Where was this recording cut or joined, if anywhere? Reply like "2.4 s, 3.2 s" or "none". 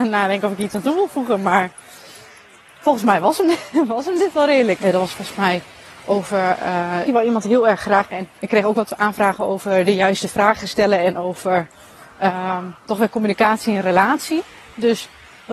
4.8 s, 7.1 s, 8.4 s